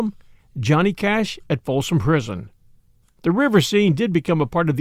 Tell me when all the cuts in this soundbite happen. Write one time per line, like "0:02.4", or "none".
0:03.0